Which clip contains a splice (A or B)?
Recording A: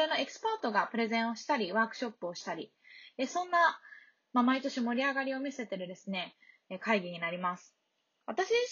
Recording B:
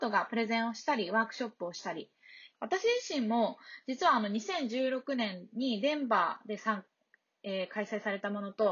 B